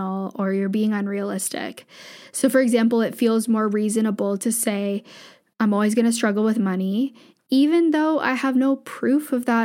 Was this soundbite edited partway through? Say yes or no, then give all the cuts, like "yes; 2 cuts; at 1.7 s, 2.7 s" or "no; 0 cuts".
no; 0 cuts